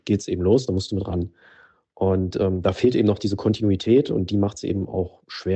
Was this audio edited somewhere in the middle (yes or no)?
no